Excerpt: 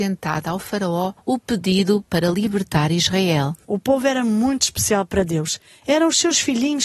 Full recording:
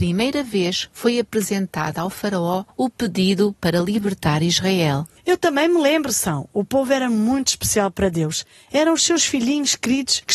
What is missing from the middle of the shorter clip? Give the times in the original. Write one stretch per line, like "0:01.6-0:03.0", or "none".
0:05.1-0:06.5